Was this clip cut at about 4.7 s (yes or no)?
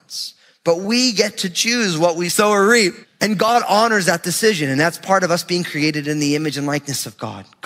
no